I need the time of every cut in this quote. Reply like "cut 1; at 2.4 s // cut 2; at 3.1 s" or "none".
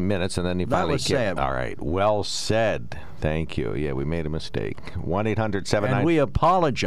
cut 1; at 1.4 s